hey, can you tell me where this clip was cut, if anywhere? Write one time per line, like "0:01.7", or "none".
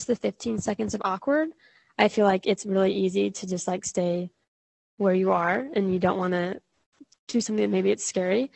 none